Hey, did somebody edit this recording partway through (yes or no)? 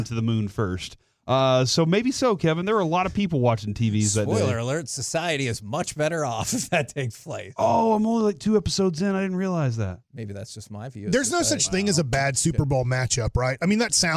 no